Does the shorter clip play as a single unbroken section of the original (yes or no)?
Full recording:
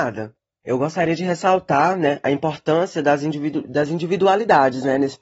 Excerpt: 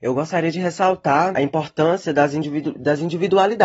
no